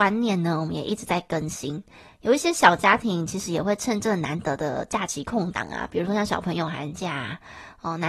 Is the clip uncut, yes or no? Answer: yes